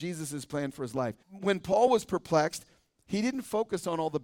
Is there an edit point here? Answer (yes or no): yes